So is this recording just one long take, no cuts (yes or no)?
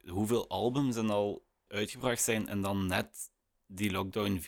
no